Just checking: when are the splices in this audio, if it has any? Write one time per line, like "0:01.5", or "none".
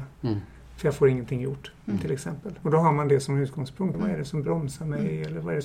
0:02.6
0:03.9